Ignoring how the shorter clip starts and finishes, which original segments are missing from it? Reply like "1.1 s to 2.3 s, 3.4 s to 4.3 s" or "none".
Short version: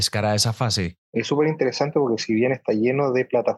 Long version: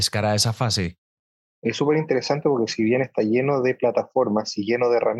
1.0 s to 1.5 s